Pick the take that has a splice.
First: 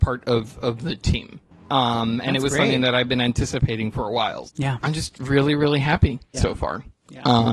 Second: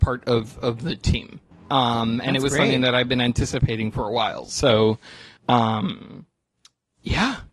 first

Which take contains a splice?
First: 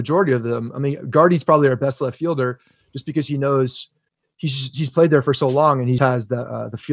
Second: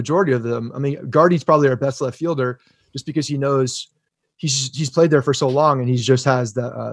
first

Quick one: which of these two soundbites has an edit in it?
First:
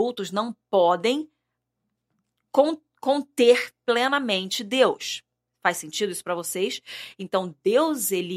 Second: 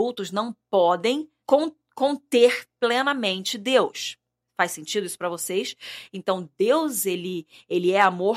second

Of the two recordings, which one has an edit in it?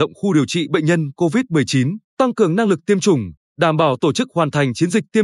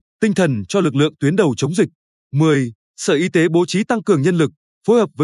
first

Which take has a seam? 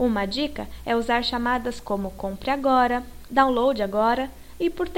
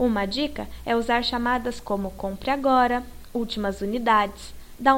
first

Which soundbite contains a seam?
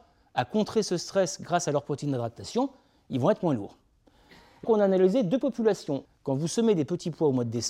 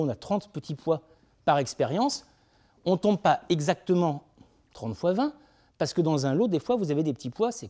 first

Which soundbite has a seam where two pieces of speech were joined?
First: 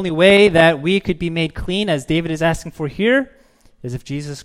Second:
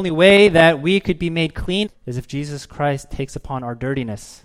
second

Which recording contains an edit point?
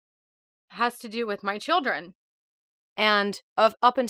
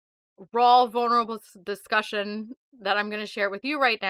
first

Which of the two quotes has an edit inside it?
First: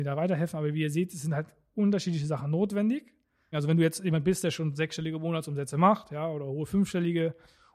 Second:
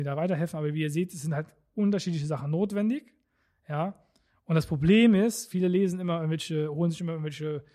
first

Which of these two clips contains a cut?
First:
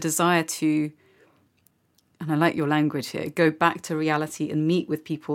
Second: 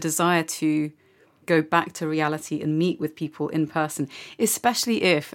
second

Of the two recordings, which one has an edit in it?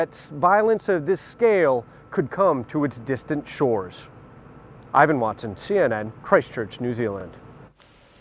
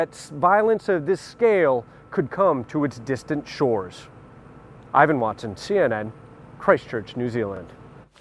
first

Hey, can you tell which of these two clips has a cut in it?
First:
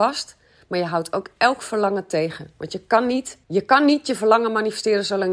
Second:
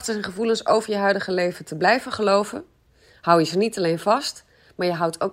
first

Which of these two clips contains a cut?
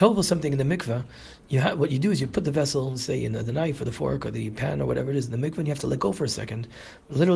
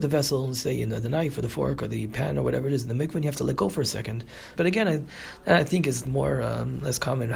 second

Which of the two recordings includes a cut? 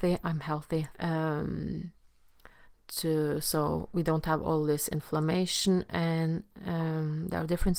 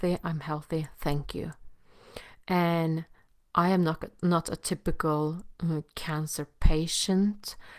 first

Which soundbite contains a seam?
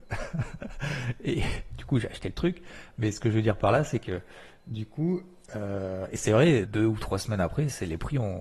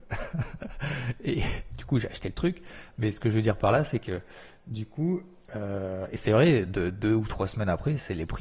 first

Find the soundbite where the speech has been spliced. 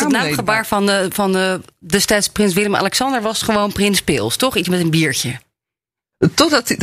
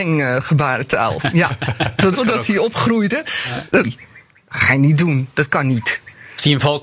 second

